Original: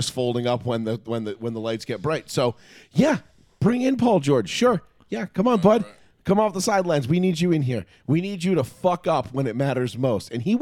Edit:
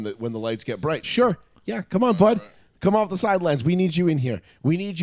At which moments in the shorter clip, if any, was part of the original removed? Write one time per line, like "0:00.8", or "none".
0:01.0